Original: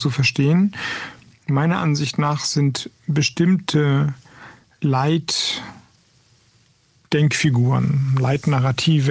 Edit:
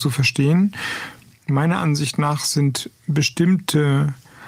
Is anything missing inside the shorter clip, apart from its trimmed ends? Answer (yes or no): no